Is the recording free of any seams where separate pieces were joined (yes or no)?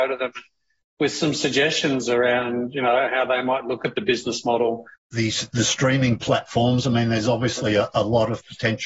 no